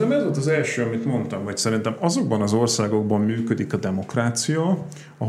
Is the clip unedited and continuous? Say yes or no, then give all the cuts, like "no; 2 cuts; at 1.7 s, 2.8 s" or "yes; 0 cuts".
yes; 0 cuts